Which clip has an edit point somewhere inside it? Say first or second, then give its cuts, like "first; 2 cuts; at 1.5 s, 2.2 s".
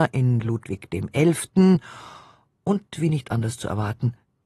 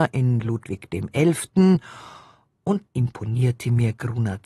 second; 1 cut; at 2.9 s